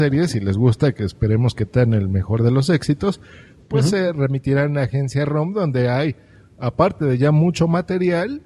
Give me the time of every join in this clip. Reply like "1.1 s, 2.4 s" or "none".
none